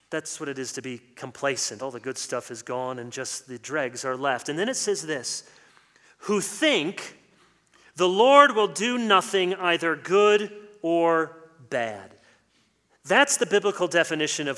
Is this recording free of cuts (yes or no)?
yes